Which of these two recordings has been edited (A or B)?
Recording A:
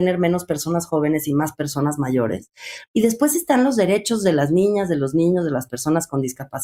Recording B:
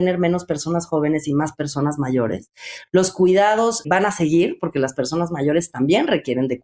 A